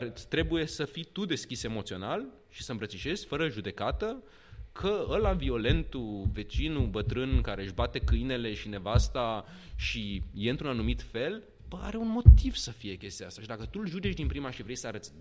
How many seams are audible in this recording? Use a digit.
0